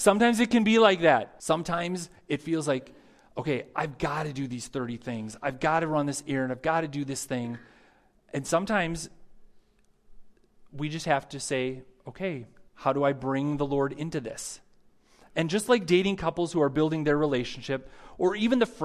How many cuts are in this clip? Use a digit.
1